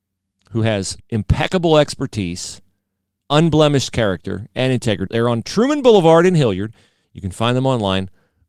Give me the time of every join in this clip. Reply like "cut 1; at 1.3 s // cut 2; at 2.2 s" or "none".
cut 1; at 1.0 s // cut 2; at 3.2 s // cut 3; at 5.1 s